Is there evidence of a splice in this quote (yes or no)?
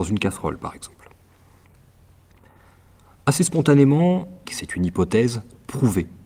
yes